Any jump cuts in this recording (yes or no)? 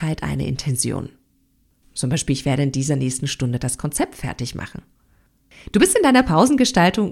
no